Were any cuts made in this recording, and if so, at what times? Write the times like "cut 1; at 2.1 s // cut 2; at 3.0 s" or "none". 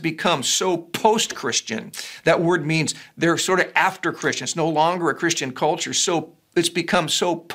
none